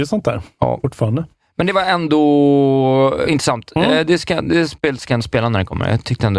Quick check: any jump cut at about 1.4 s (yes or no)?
no